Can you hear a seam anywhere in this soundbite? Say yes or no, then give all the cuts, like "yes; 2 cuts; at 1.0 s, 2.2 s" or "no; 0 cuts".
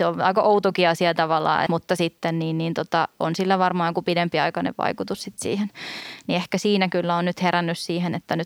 yes; 1 cut; at 1.7 s